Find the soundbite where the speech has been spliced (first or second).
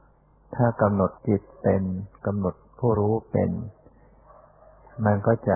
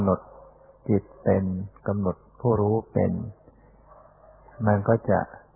first